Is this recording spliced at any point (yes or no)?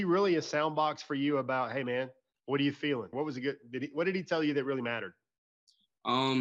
yes